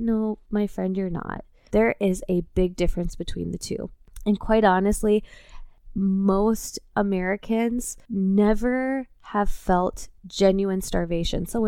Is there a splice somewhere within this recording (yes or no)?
yes